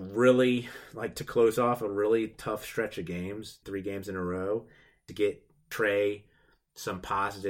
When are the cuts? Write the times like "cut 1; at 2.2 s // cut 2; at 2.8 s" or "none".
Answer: cut 1; at 3.6 s